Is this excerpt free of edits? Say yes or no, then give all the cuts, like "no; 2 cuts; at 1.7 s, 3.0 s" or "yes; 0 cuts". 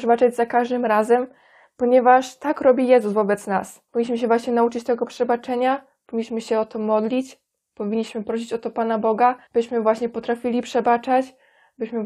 no; 2 cuts; at 3.9 s, 9.5 s